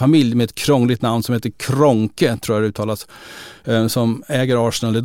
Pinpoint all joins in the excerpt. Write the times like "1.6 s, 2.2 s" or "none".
none